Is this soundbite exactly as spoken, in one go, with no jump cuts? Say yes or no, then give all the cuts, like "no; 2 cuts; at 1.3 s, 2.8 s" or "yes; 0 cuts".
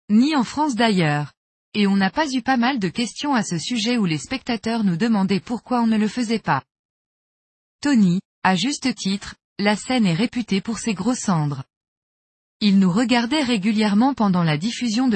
no; 2 cuts; at 8.3 s, 12.4 s